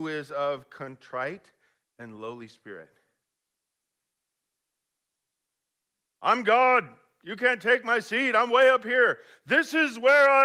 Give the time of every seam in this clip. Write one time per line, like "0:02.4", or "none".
none